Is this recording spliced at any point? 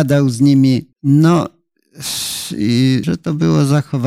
yes; 2 cuts; at 0.9 s, 3.0 s

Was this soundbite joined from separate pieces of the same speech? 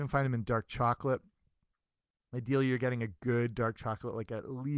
no; 0 cuts

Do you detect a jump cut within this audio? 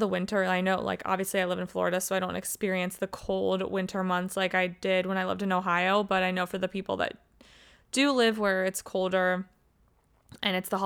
no; 0 cuts

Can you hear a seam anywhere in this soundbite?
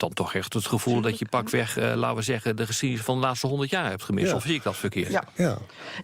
no; 0 cuts

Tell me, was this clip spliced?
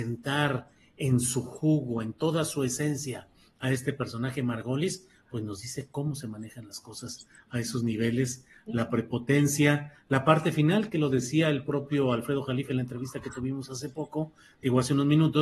no; 0 cuts

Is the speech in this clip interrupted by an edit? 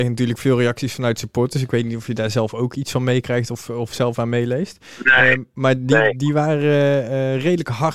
no; 0 cuts

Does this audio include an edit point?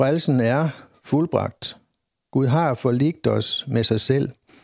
no; 0 cuts

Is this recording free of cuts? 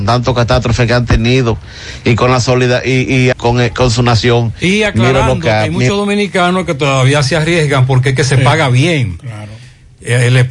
no; 1 cut; at 3.3 s

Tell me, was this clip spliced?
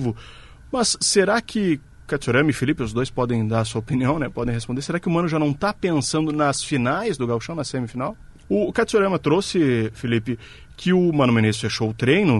yes; 1 cut; at 8.4 s

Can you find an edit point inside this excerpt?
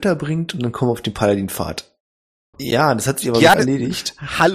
yes; 2 cuts; at 2.5 s, 3.5 s

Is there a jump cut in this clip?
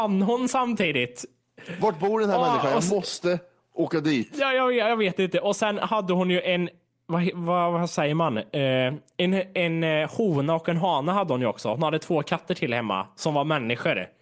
no; 0 cuts

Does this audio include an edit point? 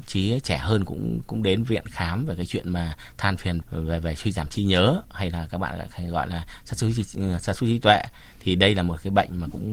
yes; 1 cut; at 3.6 s

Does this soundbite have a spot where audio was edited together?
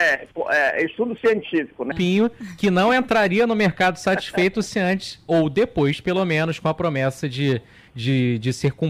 yes; 1 cut; at 1.9 s

